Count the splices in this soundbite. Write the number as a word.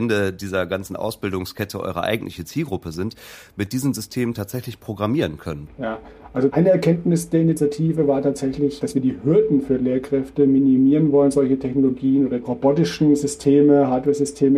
one